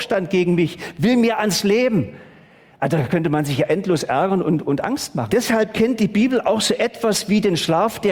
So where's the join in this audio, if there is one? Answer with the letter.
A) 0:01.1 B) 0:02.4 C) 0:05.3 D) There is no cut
C